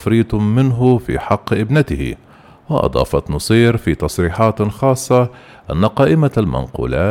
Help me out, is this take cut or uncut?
uncut